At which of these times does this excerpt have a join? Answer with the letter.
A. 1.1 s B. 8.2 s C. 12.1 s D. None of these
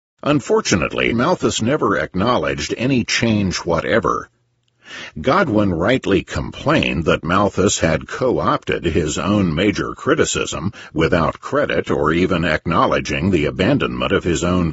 A